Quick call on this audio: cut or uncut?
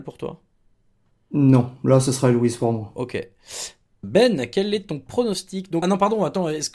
cut